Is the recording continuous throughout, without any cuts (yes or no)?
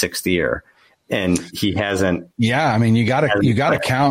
no